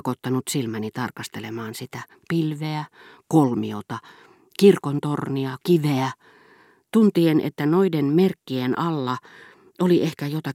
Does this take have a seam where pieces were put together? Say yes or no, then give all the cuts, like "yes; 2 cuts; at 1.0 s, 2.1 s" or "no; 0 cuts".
yes; 1 cut; at 5.6 s